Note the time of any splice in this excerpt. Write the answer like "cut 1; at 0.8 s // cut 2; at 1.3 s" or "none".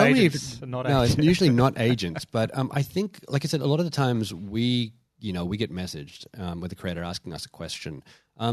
none